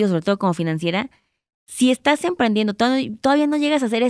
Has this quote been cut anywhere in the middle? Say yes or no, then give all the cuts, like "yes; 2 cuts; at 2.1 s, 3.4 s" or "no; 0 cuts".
no; 0 cuts